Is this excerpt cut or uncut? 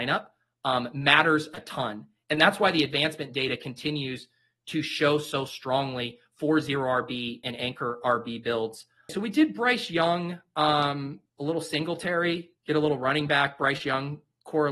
cut